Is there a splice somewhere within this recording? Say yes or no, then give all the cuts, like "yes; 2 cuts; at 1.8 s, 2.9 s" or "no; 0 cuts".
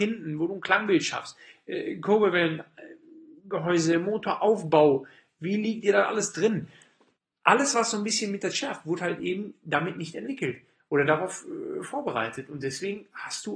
no; 0 cuts